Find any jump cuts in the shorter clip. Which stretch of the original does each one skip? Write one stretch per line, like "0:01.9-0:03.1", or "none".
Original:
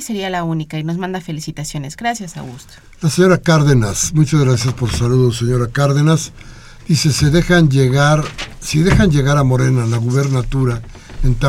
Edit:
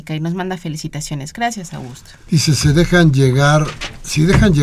0:02.9-0:06.8

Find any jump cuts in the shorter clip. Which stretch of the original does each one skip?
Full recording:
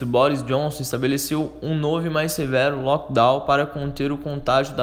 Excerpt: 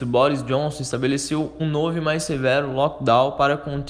0:01.6-0:01.7

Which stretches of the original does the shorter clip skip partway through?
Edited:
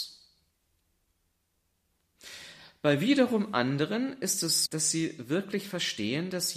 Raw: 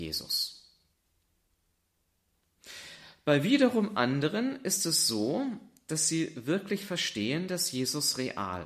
0:05.1-0:05.8

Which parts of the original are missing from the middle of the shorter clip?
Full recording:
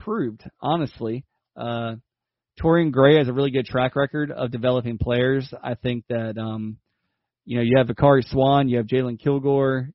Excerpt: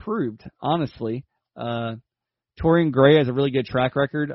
none

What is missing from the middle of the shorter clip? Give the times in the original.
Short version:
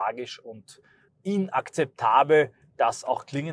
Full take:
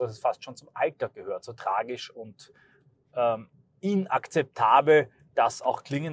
0:02.8-0:03.7

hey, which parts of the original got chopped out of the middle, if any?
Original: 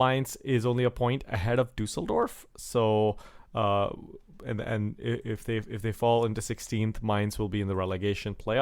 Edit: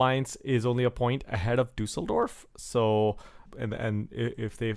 0:03.5-0:04.3

